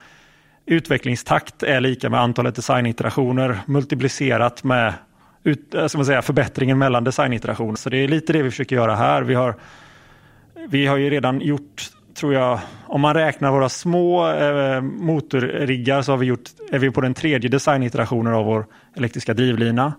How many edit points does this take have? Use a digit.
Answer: 1